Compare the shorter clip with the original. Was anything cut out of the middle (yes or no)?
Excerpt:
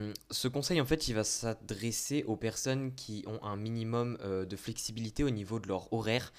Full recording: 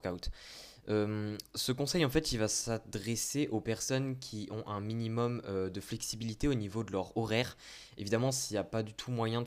no